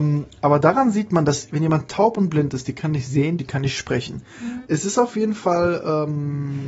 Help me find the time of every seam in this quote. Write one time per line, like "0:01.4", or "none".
0:03.4
0:04.6